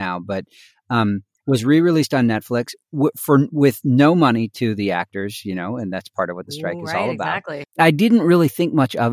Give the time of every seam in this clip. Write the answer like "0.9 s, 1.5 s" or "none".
7.6 s